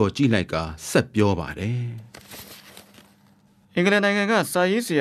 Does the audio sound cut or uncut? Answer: uncut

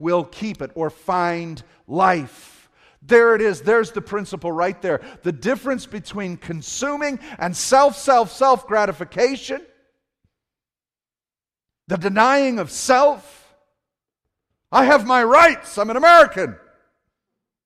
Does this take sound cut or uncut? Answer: uncut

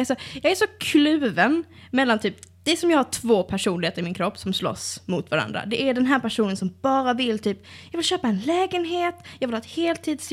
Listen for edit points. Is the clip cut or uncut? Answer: uncut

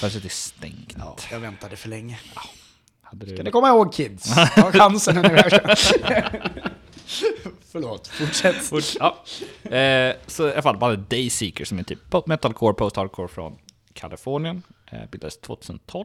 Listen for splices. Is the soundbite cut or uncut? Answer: uncut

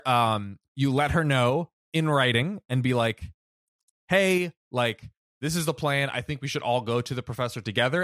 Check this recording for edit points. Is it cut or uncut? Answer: uncut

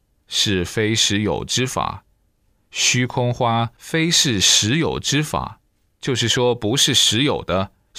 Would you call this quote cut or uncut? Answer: uncut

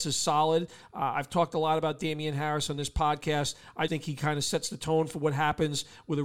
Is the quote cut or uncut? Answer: cut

